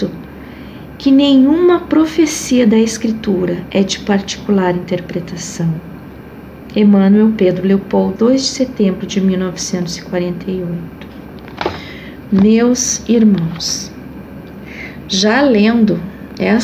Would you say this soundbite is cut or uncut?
cut